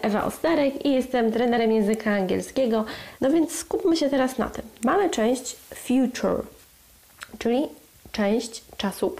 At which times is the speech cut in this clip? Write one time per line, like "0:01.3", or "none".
0:03.2